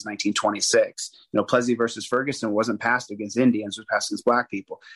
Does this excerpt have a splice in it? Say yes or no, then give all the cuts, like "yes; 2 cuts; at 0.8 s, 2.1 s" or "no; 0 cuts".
no; 0 cuts